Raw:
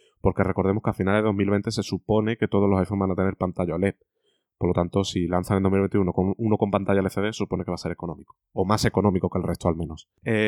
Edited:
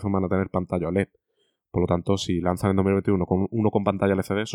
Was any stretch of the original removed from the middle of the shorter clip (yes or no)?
no